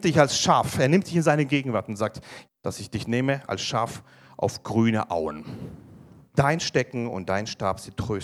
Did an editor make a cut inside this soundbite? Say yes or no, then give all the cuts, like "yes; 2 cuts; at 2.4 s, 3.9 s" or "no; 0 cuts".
yes; 2 cuts; at 2.5 s, 6.3 s